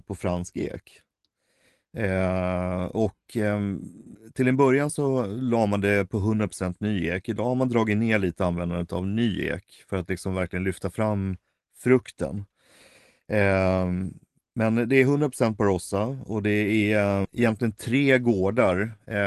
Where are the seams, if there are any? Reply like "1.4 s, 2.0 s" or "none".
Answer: 17.2 s